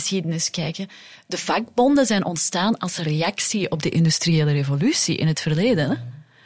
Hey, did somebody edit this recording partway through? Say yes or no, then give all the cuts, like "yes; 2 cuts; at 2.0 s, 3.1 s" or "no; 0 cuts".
no; 0 cuts